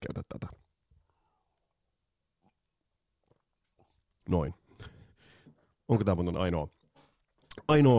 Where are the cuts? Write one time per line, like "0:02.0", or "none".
none